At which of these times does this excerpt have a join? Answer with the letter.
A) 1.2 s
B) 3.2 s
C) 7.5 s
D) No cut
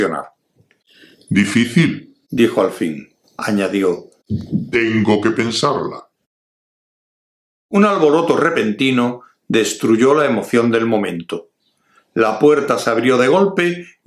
B